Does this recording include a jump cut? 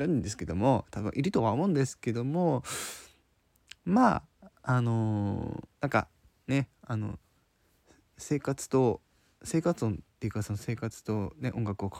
no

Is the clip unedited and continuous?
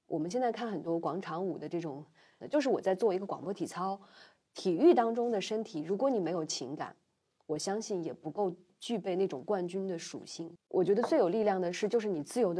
no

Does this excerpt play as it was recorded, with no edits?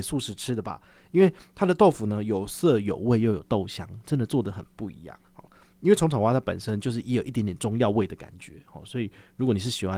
no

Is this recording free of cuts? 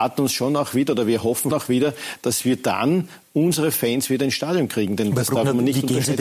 no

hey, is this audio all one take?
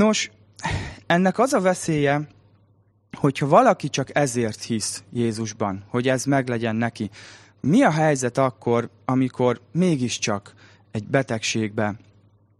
yes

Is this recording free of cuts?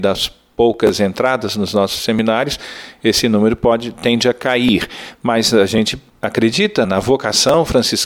no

